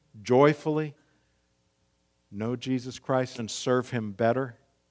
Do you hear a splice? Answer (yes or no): yes